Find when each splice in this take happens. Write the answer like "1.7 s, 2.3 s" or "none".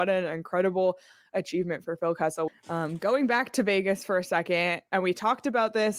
2.5 s